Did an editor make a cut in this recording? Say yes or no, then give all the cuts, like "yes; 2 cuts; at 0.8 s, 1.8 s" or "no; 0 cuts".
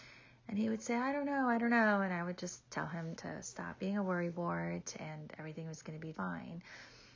yes; 2 cuts; at 3.2 s, 6.1 s